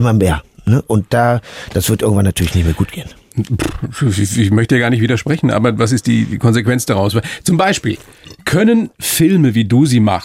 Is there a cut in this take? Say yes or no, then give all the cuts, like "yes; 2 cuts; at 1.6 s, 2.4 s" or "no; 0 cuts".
no; 0 cuts